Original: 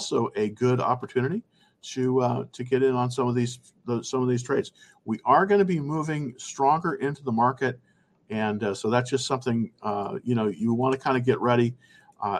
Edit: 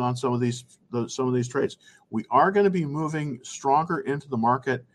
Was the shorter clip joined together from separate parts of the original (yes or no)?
no